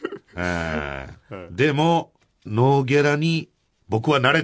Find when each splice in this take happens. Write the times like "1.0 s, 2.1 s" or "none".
2.5 s

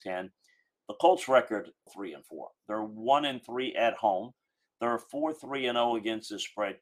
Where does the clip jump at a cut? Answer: 1.9 s

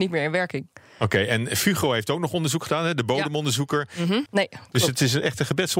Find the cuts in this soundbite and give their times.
4.3 s

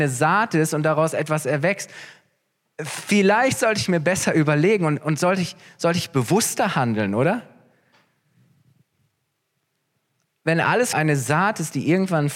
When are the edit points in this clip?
10.9 s

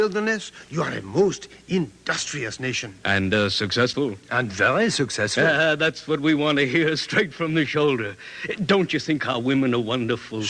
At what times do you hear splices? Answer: none

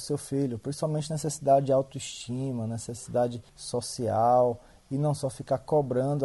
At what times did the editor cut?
3.5 s

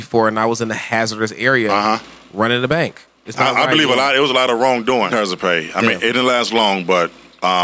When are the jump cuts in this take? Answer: 3.2 s, 5.1 s

